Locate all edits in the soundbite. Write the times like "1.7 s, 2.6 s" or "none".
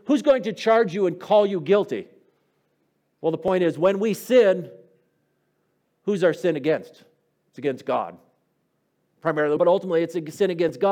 9.6 s